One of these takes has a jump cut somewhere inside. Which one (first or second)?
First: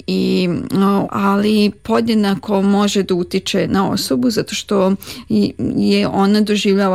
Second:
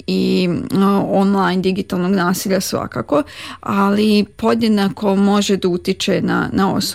first